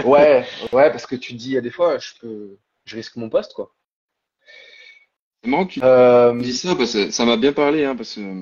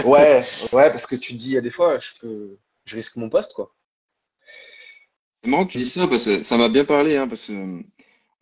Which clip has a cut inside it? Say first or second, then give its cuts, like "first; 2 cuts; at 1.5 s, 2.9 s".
second; 1 cut; at 5.7 s